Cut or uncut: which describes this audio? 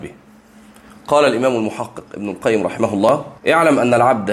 cut